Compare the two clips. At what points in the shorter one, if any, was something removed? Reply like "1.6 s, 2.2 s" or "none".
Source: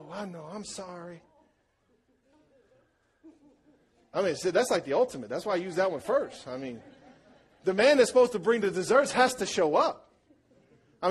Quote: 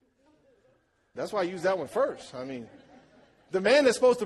1.1 s